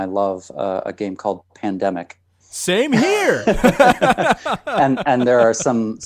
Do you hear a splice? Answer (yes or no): no